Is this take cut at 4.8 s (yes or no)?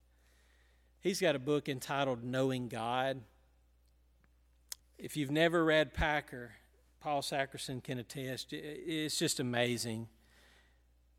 yes